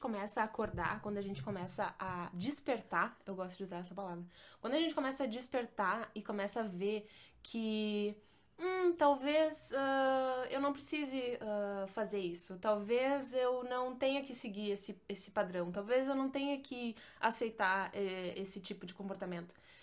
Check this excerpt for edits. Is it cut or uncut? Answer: uncut